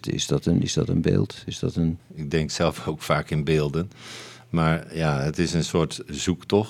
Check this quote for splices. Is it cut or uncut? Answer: cut